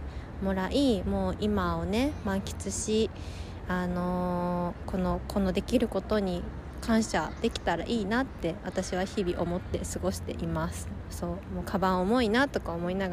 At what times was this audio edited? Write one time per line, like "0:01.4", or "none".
0:04.8
0:11.0